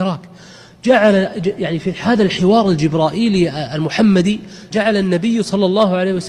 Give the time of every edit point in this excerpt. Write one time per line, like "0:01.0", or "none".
0:04.7